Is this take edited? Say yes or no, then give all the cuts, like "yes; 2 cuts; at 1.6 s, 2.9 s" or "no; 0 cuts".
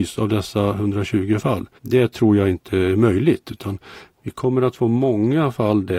yes; 1 cut; at 1.8 s